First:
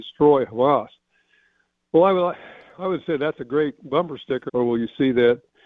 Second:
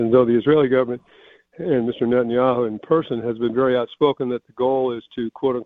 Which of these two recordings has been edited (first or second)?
first